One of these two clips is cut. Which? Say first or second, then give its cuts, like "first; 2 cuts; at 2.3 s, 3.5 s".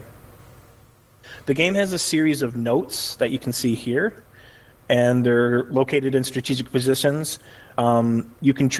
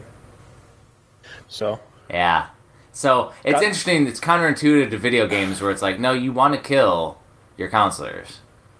second; 1 cut; at 1.4 s